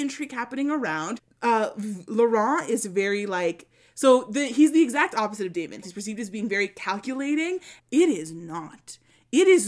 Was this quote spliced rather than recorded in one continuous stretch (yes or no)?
yes